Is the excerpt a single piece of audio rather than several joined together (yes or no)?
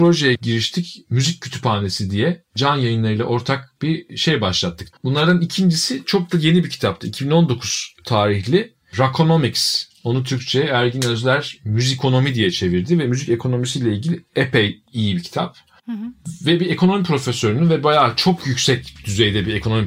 no